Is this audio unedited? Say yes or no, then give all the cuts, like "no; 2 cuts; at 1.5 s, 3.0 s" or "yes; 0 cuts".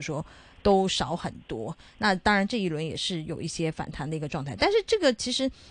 yes; 0 cuts